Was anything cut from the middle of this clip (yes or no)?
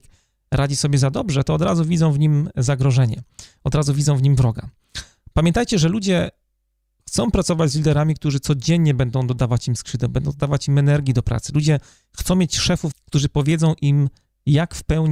yes